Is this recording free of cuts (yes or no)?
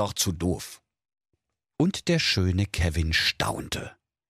yes